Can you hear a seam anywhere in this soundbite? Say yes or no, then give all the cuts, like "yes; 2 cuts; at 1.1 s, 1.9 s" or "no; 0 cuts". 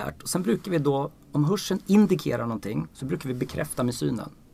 no; 0 cuts